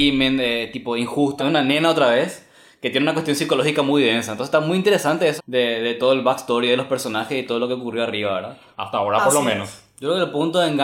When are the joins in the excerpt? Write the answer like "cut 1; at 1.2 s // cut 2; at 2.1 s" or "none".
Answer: cut 1; at 1.4 s // cut 2; at 5.4 s // cut 3; at 8.7 s